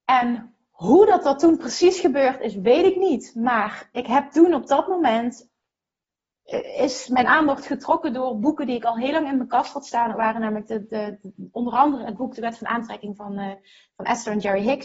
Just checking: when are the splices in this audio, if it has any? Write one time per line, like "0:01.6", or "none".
0:03.9

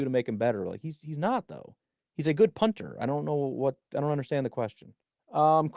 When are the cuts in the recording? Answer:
none

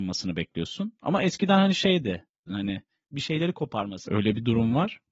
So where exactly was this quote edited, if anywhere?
0:02.5
0:04.1

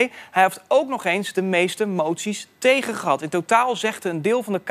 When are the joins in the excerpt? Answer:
none

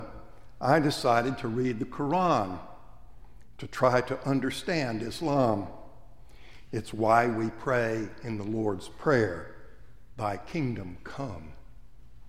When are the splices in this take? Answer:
0:06.7

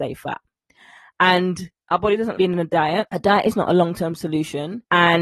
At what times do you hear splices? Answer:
0:02.3

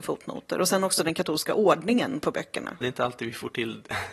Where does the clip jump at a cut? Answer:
0:02.8

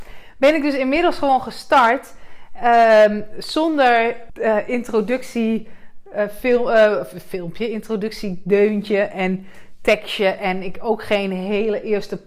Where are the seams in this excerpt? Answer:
0:04.3

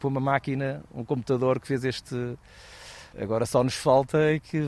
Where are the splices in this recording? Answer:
0:03.1

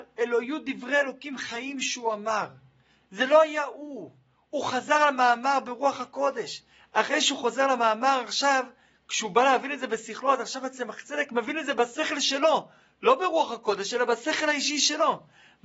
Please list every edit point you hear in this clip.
none

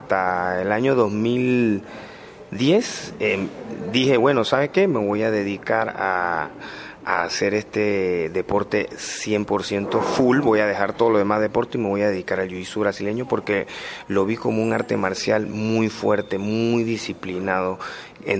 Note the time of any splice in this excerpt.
none

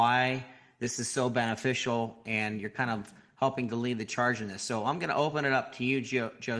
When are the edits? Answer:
none

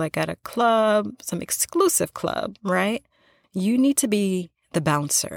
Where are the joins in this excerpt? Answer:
0:03.4

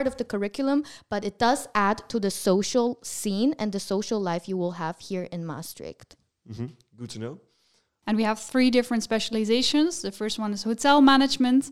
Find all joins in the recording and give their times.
0:08.0

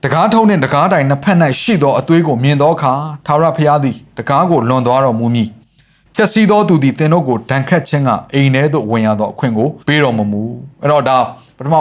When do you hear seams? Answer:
0:09.8

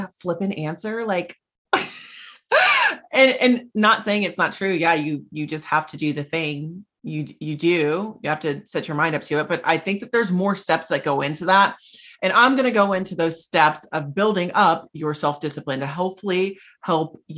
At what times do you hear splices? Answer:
0:01.5

